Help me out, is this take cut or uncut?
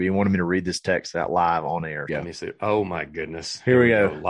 cut